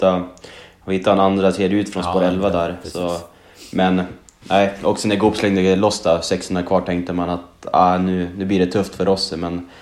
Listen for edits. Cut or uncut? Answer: uncut